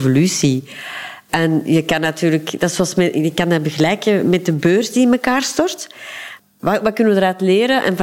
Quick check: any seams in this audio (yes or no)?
yes